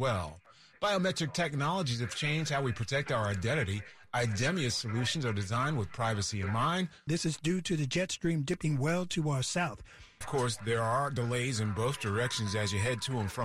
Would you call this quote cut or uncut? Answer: cut